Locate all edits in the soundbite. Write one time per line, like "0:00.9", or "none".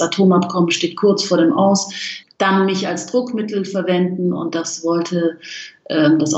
0:02.2